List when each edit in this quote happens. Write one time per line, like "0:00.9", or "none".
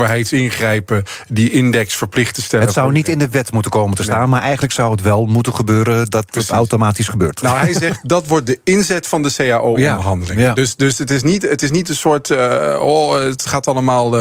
none